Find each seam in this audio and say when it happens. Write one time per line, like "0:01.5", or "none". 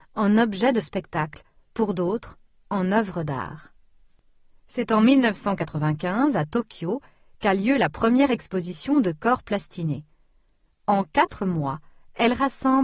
none